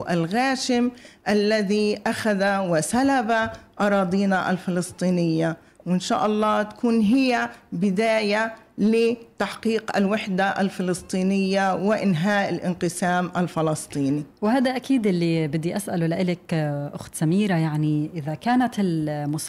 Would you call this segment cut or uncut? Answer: uncut